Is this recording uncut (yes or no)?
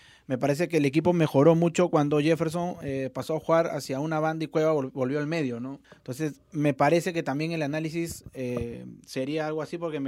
no